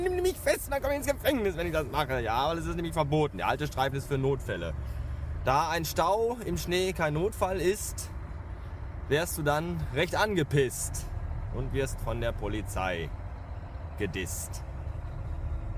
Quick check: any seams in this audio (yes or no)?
no